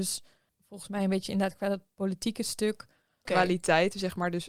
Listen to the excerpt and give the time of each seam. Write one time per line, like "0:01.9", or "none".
0:03.3